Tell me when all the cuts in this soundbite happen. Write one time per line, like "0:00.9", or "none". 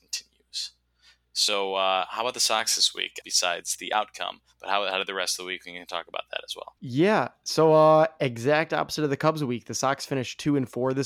0:03.2